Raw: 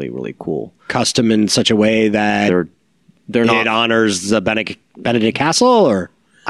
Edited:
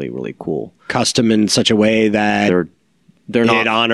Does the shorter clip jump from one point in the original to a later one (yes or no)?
no